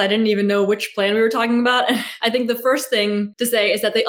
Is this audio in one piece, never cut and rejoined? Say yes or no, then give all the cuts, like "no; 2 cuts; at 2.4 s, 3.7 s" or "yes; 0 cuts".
yes; 0 cuts